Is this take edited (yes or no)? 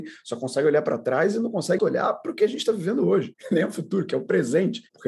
yes